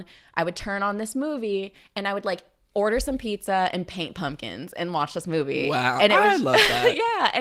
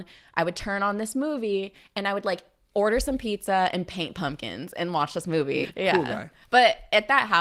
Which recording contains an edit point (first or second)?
second